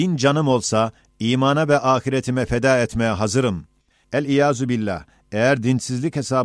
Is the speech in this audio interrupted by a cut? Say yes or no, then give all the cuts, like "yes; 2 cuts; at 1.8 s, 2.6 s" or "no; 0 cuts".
yes; 1 cut; at 4.0 s